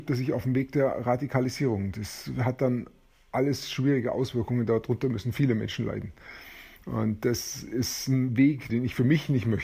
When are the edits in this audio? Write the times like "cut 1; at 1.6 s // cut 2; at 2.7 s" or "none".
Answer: cut 1; at 6.8 s // cut 2; at 8.7 s